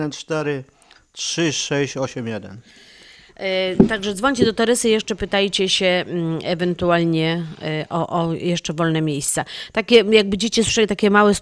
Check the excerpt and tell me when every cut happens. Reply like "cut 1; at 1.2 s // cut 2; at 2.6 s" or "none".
none